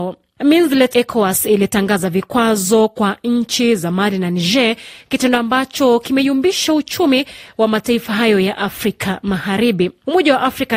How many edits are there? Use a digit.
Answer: 1